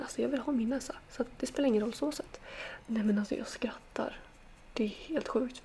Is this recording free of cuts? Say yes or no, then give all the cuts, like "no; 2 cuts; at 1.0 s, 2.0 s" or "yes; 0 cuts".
no; 1 cut; at 2.8 s